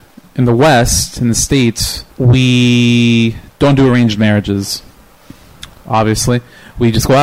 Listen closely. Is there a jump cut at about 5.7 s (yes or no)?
no